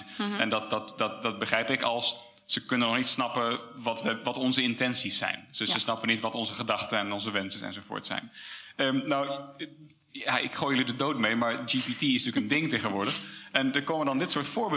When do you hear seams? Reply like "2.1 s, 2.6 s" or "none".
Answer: none